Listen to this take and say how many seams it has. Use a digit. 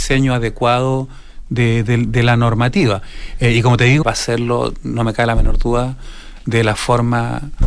1